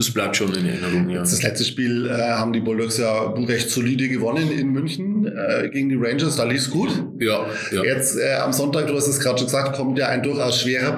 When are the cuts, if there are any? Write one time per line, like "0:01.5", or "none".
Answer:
none